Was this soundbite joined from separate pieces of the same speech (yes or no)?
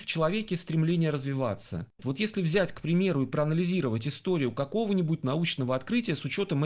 yes